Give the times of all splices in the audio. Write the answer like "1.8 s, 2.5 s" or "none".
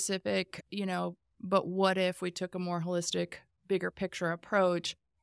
1.3 s

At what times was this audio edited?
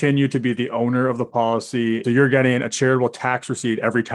2.0 s

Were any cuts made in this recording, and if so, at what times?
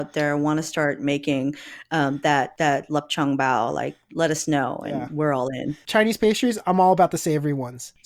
none

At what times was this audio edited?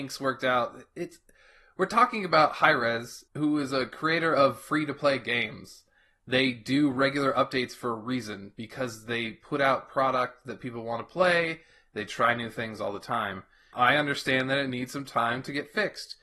3.3 s, 13.7 s

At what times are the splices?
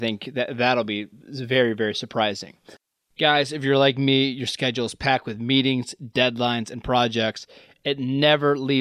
none

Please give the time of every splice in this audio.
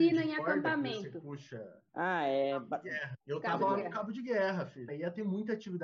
1.9 s, 3.2 s, 4.9 s

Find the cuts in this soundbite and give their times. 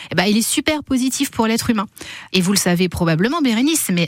2.3 s

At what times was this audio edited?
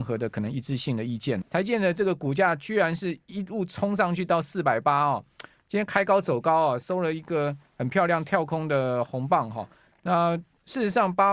1.4 s

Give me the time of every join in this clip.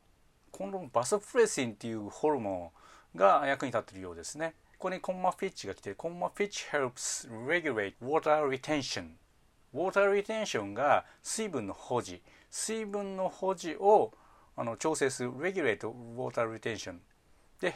none

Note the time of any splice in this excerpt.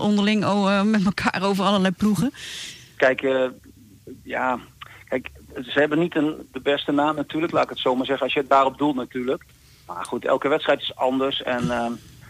3.0 s

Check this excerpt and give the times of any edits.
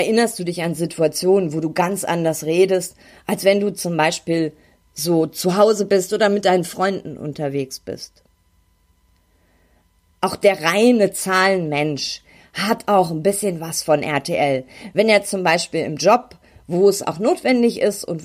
none

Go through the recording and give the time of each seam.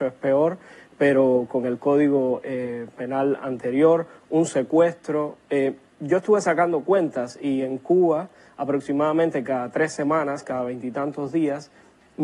none

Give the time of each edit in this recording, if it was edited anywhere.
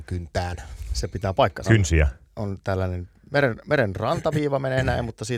1.6 s

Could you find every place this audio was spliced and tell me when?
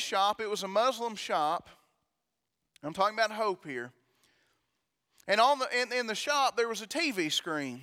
none

